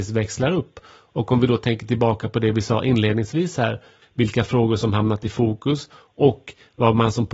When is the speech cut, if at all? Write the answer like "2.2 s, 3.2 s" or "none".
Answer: 4.0 s